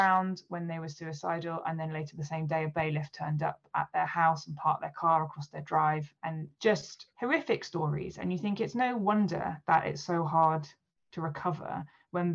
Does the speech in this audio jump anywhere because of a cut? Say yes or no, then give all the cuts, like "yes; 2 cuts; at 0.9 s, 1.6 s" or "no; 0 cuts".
no; 0 cuts